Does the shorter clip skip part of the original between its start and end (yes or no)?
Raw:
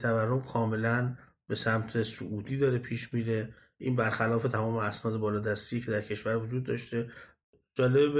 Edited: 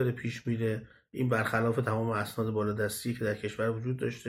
no